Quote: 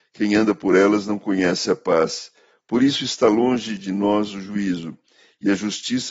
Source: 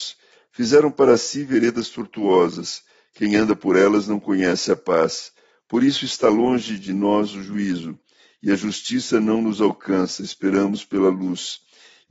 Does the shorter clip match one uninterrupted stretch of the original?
yes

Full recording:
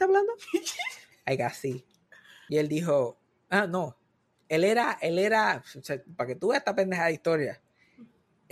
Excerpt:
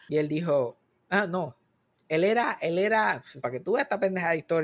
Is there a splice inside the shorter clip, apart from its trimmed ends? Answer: yes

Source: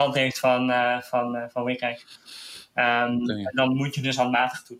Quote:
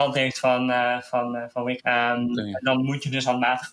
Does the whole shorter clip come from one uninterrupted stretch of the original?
no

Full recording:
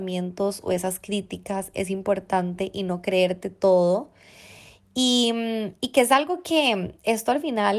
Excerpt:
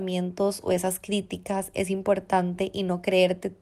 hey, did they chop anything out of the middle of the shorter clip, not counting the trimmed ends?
no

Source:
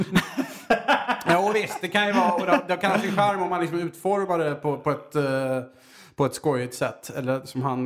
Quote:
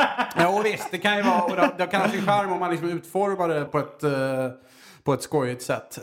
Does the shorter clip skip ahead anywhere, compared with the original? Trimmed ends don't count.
yes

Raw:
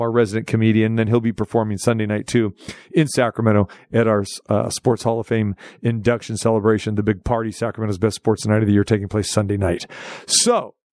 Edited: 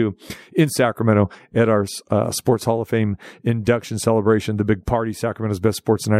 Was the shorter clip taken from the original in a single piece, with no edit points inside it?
yes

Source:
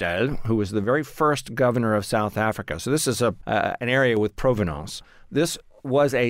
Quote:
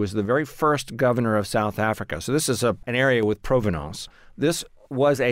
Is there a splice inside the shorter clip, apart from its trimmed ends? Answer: yes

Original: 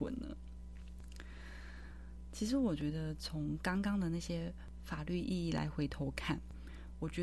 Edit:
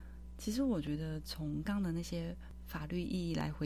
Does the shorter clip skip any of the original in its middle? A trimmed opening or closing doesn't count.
yes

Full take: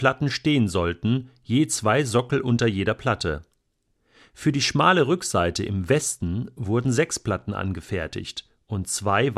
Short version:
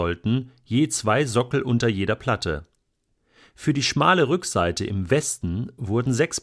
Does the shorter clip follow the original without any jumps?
yes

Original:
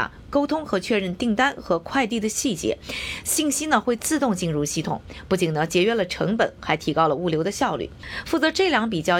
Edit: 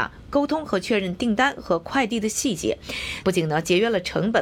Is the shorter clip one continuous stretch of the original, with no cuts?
no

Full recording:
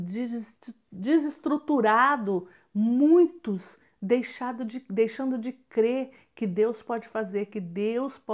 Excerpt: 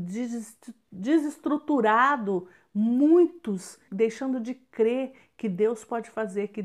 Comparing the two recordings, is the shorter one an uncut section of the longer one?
no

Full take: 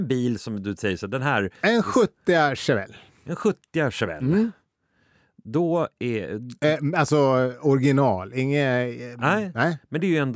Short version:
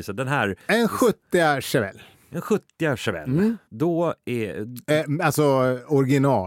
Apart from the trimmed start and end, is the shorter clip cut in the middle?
yes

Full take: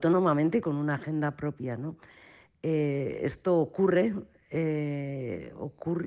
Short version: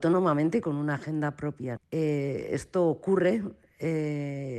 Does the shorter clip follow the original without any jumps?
no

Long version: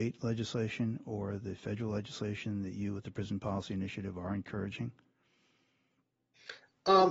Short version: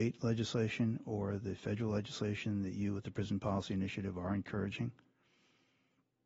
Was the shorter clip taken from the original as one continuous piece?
yes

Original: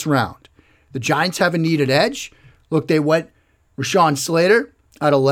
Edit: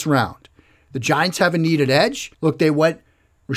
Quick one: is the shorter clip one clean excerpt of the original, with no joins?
no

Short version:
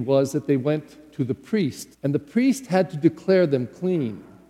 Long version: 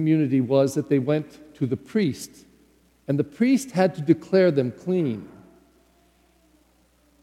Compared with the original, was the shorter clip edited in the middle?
yes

